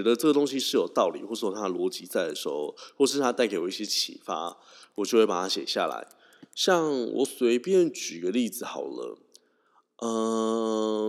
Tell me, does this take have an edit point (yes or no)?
no